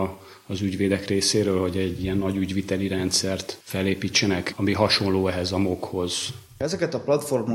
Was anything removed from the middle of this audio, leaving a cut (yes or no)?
yes